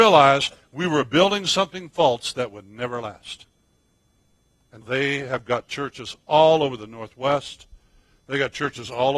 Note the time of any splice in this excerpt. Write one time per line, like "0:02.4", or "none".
0:04.8